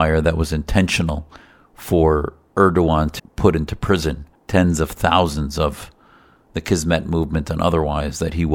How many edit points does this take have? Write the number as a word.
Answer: two